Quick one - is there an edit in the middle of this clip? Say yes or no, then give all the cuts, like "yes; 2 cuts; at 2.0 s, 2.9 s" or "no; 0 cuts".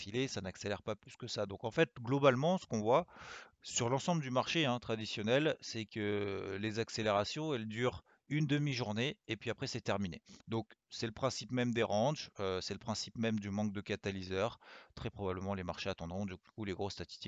yes; 1 cut; at 10.4 s